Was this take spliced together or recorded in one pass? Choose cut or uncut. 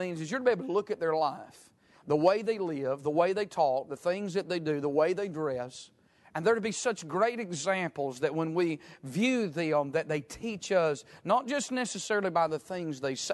uncut